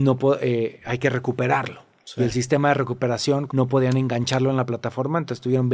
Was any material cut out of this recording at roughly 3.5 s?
yes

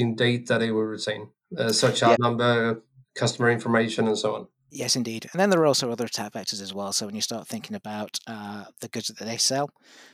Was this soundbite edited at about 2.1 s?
yes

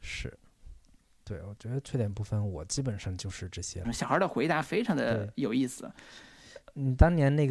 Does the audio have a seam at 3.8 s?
yes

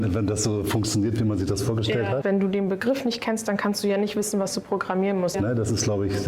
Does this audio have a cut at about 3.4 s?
no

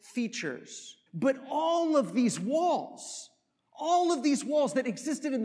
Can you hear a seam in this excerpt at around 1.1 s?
yes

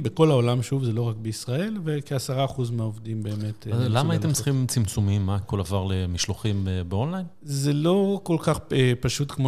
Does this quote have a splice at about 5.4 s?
yes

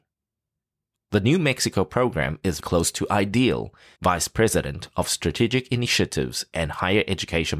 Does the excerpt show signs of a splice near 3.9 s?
yes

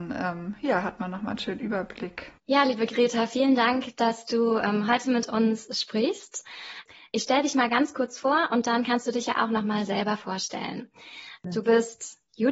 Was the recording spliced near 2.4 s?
yes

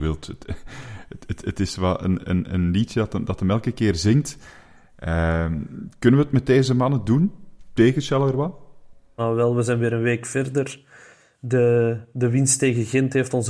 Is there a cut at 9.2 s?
yes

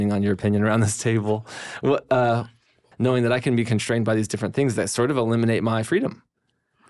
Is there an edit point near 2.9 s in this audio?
yes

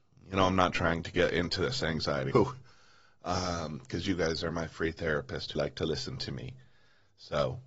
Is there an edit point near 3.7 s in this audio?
no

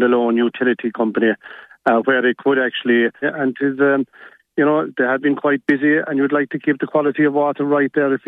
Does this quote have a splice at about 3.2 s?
yes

